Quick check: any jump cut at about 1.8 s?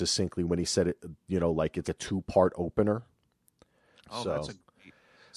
yes; 2 cuts; at 1.8 s, 4.0 s

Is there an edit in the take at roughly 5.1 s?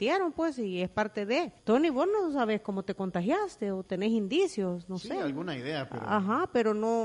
no; 1 cut; at 1.6 s

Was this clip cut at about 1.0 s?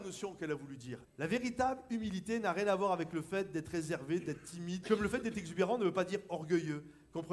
yes; 2 cuts; at 1.0 s, 4.8 s

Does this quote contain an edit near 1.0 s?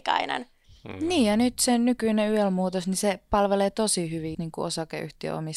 no; 1 cut; at 4.3 s

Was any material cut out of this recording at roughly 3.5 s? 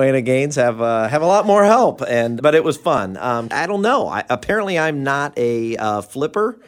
yes; 2 cuts; at 2.4 s, 3.5 s

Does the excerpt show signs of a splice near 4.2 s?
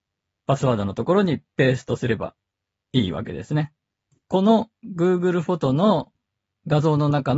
yes; 1 cut; at 4.2 s

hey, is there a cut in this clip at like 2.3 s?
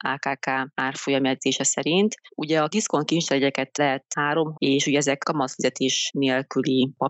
no; 1 cut; at 4.5 s

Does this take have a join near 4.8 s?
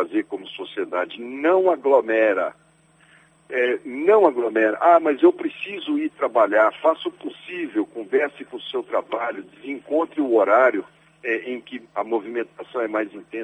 no; 0 cuts

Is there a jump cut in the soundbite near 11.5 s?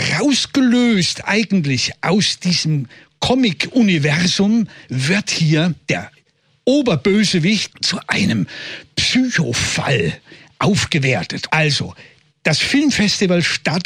yes; 2 cuts; at 7.7 s, 11.5 s

